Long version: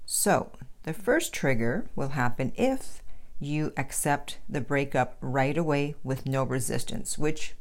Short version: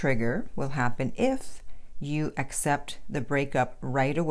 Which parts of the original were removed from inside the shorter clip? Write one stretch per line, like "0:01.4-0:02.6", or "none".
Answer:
none